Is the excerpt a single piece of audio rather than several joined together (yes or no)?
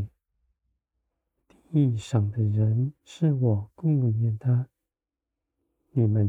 no